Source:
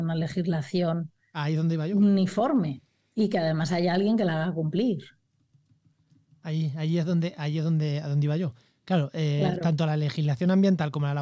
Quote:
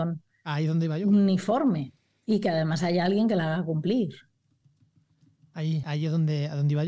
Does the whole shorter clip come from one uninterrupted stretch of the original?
no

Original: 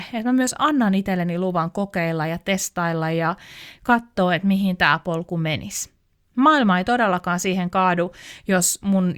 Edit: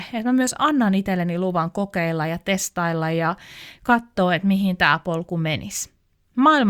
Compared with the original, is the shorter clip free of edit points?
yes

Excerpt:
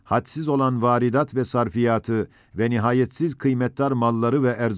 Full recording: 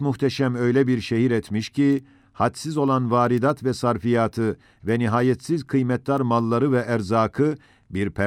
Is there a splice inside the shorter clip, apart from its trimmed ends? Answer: no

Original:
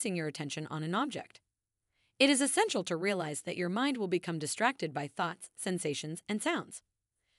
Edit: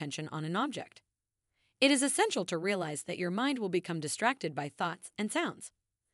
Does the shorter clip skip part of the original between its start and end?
yes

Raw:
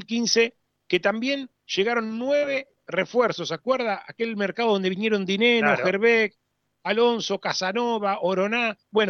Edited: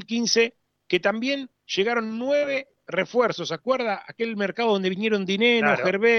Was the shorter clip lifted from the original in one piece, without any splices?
yes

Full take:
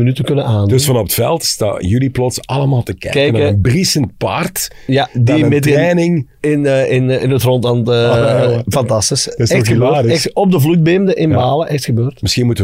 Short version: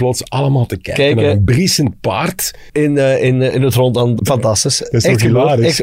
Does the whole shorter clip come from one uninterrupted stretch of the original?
no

